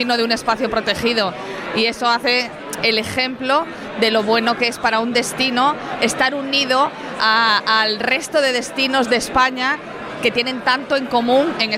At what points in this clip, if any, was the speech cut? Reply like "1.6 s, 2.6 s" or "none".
2.8 s